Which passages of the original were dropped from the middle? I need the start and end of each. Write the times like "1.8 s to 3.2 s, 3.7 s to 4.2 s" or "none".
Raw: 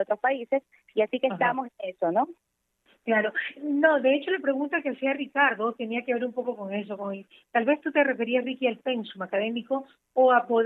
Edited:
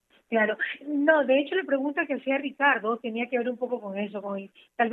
none